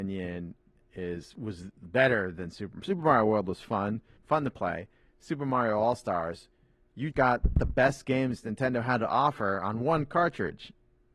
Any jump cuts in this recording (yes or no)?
yes